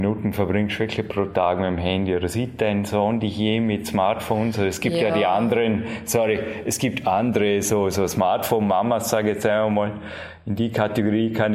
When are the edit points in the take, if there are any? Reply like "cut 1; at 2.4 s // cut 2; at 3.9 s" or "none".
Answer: none